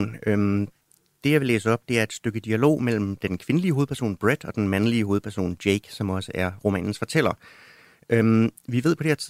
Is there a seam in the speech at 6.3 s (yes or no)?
no